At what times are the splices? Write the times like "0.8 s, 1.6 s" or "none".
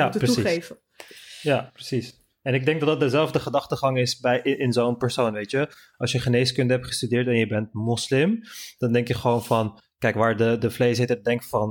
none